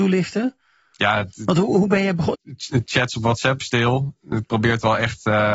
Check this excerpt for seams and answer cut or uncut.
cut